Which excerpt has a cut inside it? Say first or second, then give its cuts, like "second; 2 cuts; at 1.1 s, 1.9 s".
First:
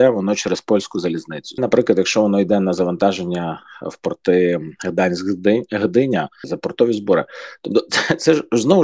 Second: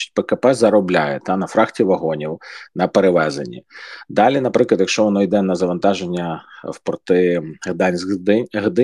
first; 2 cuts; at 1.6 s, 6.4 s